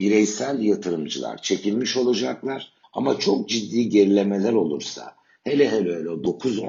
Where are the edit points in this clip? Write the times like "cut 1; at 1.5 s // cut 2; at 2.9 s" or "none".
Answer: cut 1; at 2.8 s